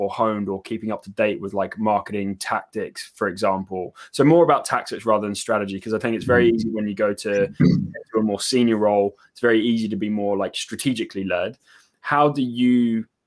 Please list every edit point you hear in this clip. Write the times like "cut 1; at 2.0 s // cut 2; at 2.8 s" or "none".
none